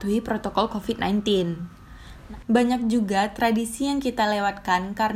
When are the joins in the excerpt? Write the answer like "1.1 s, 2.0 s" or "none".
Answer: 2.4 s